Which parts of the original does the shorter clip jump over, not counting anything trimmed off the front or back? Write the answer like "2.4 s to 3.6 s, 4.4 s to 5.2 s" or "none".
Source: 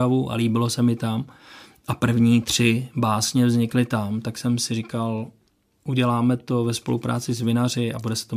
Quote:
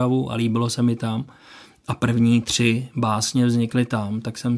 none